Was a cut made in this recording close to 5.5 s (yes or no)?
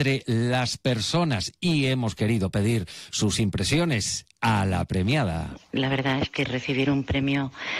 yes